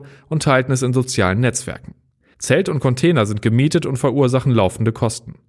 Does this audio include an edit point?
yes; 1 cut; at 2.3 s

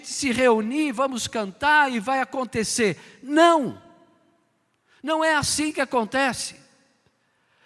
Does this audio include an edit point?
no; 0 cuts

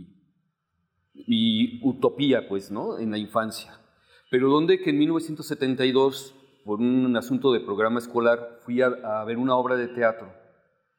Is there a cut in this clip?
no; 0 cuts

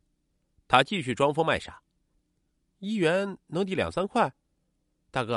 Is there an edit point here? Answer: no; 0 cuts

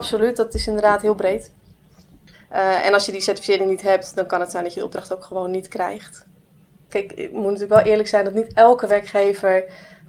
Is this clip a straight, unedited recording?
no; 2 cuts; at 2.3 s, 6.9 s

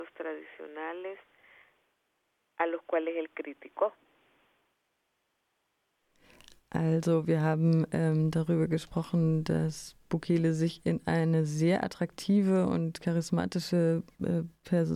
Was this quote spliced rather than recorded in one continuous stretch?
no; 0 cuts

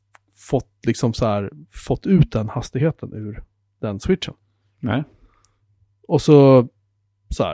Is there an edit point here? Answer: no; 0 cuts

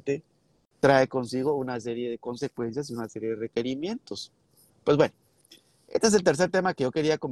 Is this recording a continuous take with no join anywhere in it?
no; 1 cut; at 4.7 s

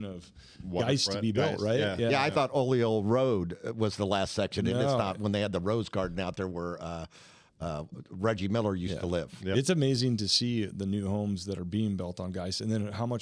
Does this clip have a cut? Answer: no; 0 cuts

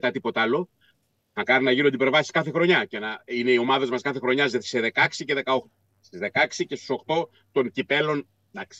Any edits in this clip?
no; 0 cuts

